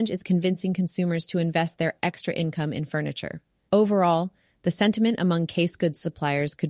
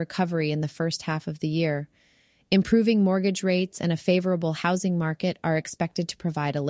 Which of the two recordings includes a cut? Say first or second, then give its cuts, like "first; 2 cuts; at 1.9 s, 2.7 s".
first; 1 cut; at 3.7 s